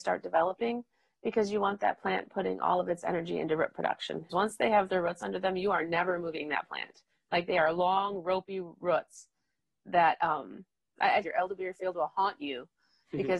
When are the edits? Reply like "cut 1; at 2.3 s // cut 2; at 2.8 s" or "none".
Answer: cut 1; at 4.3 s // cut 2; at 11.2 s